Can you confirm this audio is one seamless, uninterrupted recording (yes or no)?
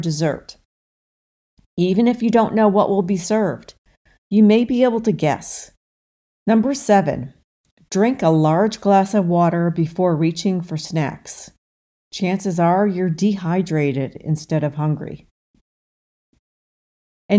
no